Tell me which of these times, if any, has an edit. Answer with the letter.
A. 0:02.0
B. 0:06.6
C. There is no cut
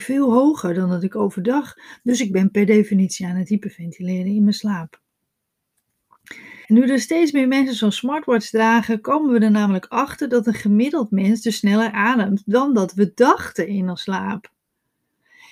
B